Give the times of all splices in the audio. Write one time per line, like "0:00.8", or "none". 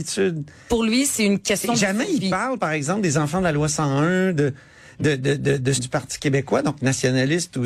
0:05.8